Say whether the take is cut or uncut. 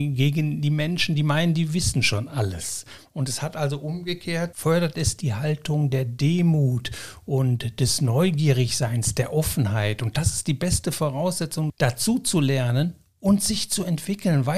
cut